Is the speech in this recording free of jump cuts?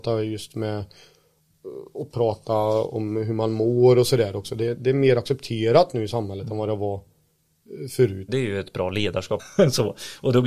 no; 2 cuts; at 8.3 s, 9.4 s

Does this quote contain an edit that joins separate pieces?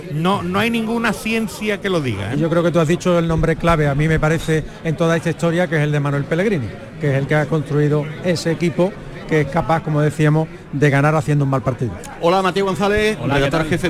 no; 0 cuts

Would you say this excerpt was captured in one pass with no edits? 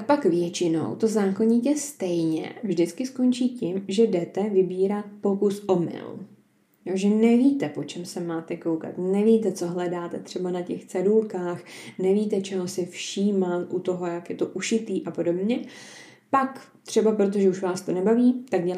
yes; 0 cuts

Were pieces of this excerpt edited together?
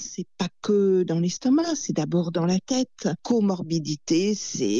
yes; 1 cut; at 3.2 s

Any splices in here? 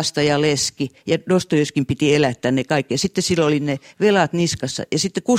no; 0 cuts

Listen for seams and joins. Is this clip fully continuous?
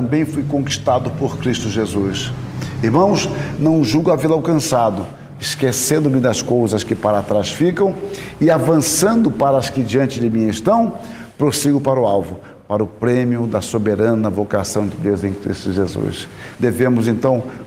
no; 3 cuts; at 3.6 s, 5.4 s, 16.5 s

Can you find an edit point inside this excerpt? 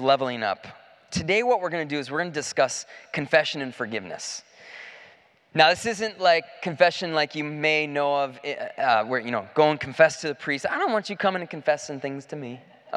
no; 0 cuts

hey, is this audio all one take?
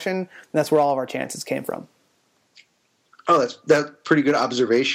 yes; 0 cuts

